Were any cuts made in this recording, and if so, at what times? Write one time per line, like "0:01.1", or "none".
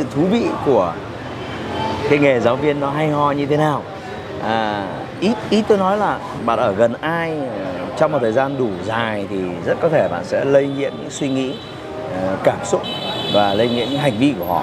0:06.4

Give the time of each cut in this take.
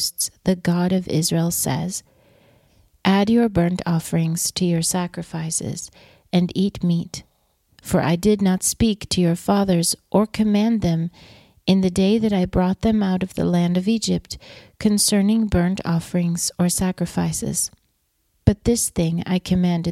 none

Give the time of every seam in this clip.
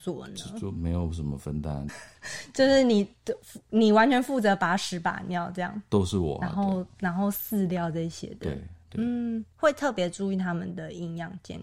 0:01.9

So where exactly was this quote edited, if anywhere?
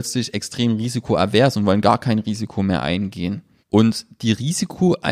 0:03.6

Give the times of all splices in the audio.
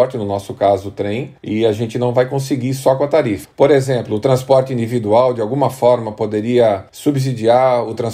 0:03.4

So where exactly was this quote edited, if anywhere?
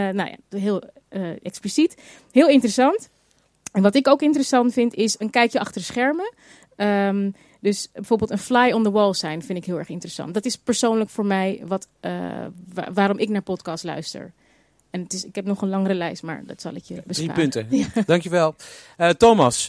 none

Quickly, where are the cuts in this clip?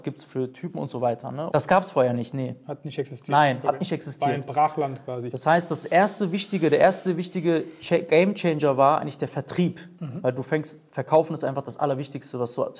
0:01.5

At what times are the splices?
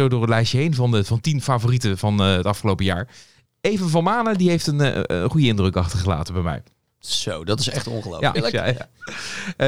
0:08.4

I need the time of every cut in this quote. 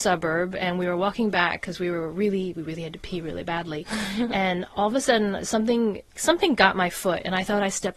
0:06.2

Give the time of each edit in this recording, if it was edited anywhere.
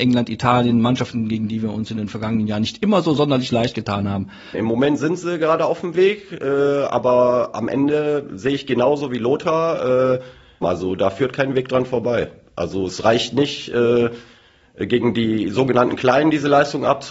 0:04.5
0:10.6

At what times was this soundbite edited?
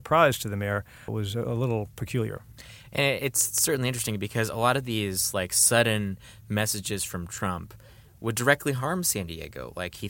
0:01.1

